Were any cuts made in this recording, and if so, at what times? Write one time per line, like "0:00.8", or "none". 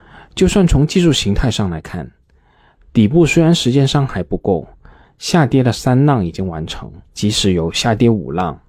0:05.0
0:07.1